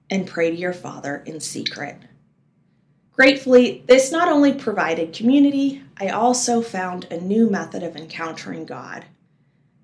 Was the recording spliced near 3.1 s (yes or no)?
yes